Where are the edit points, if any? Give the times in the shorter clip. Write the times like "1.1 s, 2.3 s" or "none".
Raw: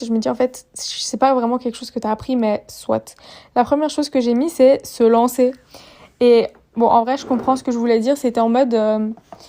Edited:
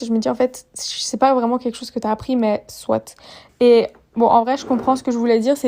3.5 s